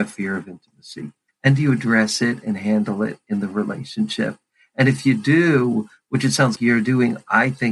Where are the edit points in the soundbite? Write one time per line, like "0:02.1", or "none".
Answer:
0:01.3
0:06.5